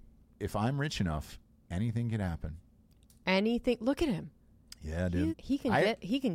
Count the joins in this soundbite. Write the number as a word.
one